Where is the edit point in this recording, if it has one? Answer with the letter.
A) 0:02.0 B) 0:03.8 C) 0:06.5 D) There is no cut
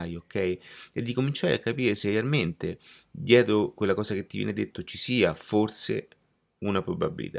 B